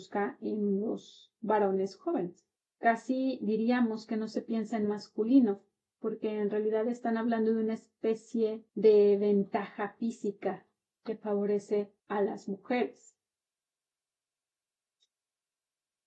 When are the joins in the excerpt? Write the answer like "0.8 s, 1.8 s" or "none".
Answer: 8.7 s, 12.0 s